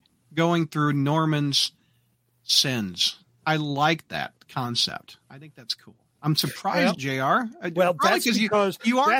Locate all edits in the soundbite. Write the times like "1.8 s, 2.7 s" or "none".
6.9 s